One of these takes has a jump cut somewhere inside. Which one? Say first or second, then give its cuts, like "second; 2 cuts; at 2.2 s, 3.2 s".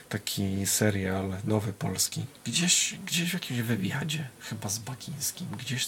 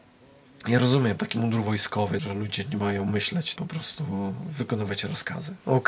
second; 2 cuts; at 2.2 s, 3.6 s